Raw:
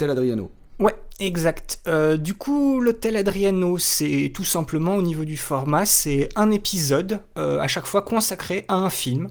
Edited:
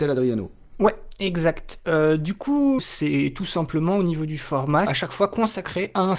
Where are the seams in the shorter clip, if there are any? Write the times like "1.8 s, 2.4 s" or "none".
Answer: 2.8 s, 4.9 s

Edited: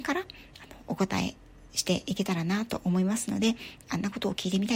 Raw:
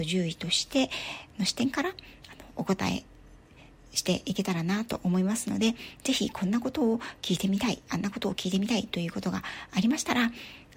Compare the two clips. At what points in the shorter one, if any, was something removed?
1.7 s, 3.8 s

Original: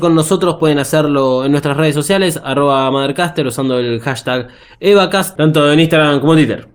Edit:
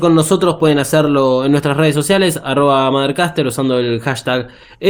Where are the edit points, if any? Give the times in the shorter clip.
none

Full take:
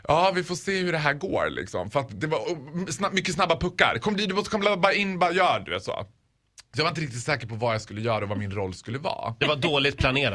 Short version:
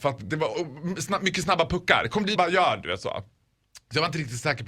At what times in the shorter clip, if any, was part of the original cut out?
2.4 s

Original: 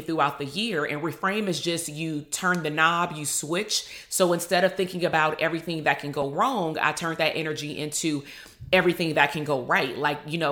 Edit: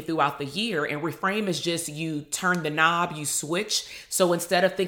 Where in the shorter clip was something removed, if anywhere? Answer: none

